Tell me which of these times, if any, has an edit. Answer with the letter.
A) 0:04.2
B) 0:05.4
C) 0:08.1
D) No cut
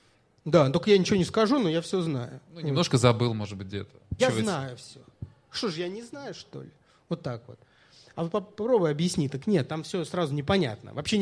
A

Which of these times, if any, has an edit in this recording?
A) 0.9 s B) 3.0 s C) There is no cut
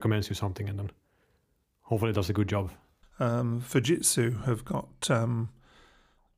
B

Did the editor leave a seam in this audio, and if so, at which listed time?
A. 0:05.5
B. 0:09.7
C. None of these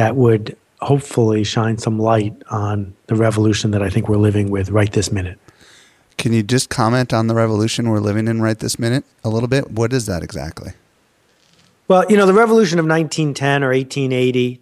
C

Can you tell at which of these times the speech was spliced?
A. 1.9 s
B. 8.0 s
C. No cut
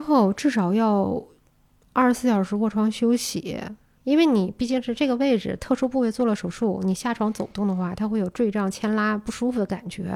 C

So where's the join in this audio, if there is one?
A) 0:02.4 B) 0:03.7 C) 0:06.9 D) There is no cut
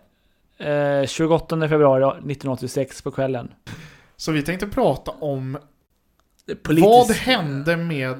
B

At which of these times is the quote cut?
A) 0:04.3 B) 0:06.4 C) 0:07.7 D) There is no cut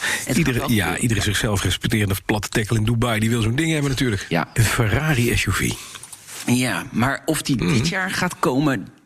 A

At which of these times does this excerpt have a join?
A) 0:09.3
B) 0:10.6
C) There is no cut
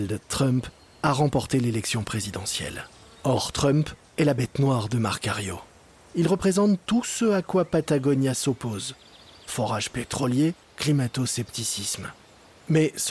B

